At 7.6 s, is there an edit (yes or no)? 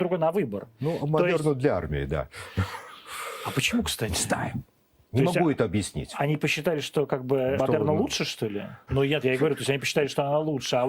yes